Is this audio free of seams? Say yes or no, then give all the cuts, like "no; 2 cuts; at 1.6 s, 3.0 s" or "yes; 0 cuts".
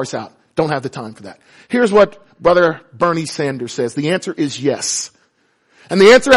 yes; 0 cuts